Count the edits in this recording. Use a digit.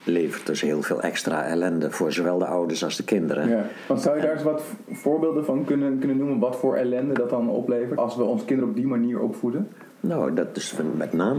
1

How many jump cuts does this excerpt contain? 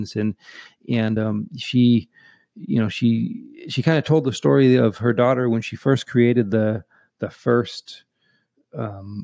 0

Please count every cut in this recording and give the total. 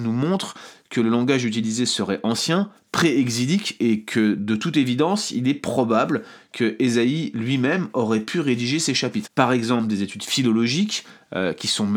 1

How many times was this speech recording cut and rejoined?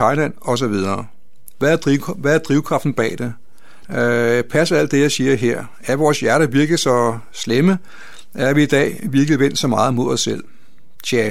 1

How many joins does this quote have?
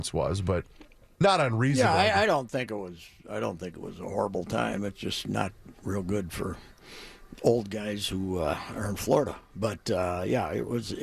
0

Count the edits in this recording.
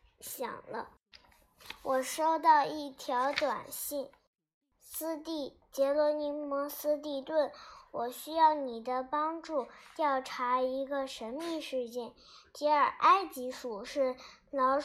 0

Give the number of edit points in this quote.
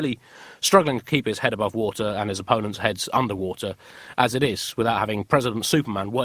0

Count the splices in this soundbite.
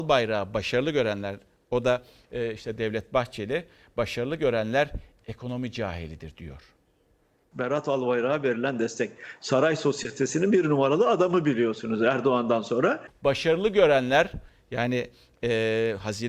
1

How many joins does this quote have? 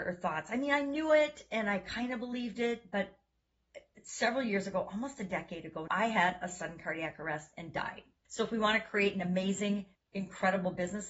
3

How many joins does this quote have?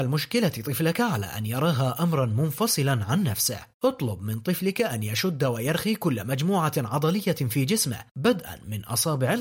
1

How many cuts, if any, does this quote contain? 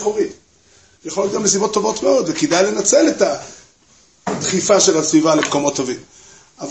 1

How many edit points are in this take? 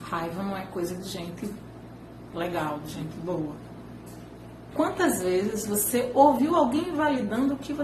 2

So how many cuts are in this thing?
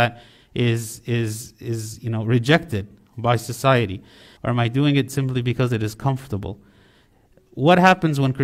1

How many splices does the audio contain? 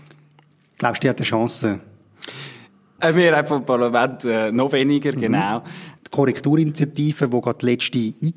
2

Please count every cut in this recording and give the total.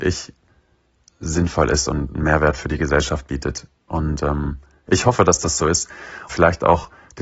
1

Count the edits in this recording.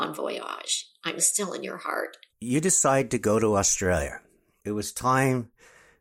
1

